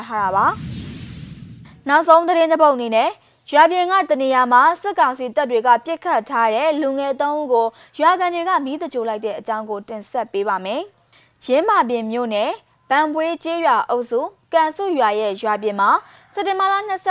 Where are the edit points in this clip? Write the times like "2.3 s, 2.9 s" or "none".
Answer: none

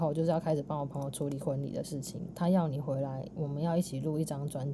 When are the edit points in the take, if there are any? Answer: 2.3 s

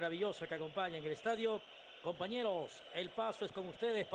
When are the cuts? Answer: none

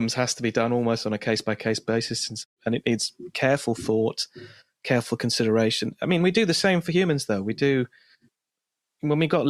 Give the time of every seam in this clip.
none

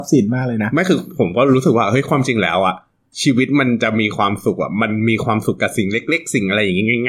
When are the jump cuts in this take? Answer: none

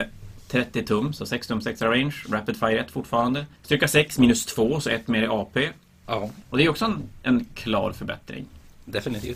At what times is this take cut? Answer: 3.5 s, 6.0 s

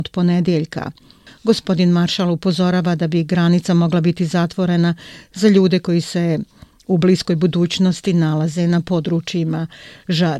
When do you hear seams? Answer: 1.3 s

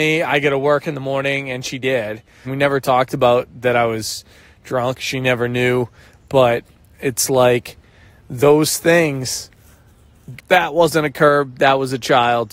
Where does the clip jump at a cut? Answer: 2.4 s, 10.4 s

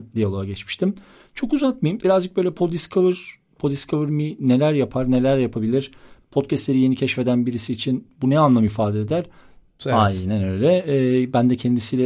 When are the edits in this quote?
2.0 s, 6.2 s, 9.8 s

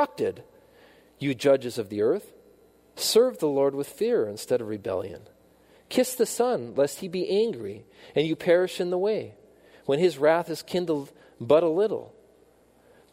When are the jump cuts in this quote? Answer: 5.8 s

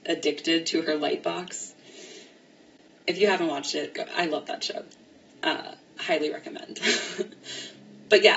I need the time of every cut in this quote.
none

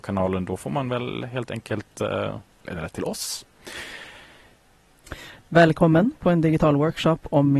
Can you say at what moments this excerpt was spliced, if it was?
2.7 s, 5.4 s

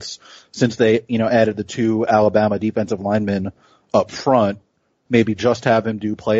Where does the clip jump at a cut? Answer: 5.1 s

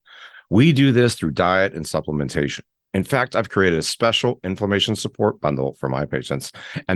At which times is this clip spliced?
none

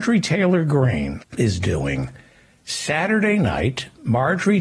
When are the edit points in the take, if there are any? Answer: 1.2 s

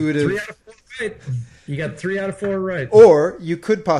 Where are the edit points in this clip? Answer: none

